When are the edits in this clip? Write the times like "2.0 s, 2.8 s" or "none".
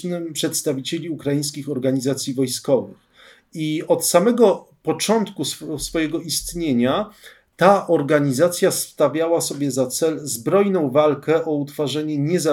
none